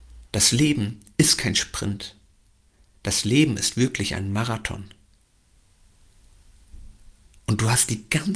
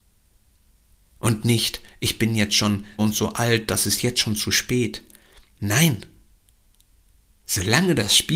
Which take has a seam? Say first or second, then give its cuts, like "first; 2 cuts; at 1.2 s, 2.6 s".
second; 1 cut; at 3.0 s